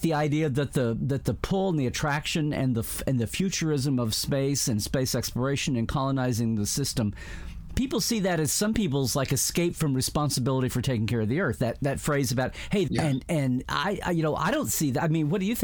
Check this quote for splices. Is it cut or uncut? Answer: cut